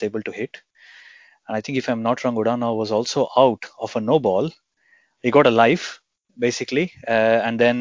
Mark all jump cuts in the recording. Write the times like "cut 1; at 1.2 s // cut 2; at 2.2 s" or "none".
none